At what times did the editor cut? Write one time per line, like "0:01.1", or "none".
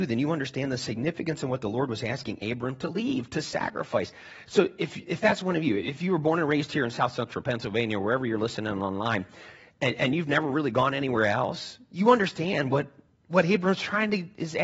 none